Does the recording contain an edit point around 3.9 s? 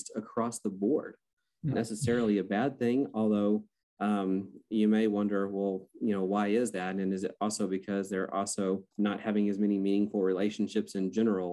no; 2 cuts; at 1.7 s, 8.9 s

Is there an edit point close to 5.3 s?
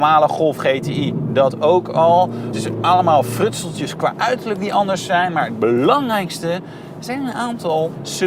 no; 1 cut; at 2.5 s

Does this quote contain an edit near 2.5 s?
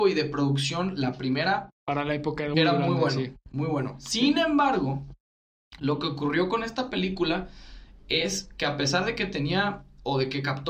yes; 1 cut; at 2.5 s

